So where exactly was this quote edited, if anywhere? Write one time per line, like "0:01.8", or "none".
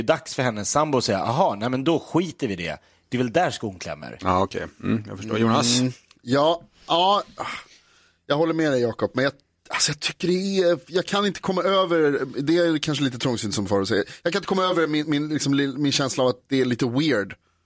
none